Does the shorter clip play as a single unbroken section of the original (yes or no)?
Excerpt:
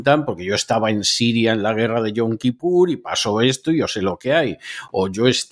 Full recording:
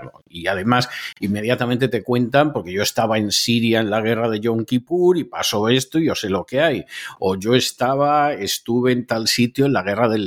yes